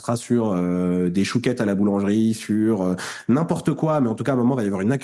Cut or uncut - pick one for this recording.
uncut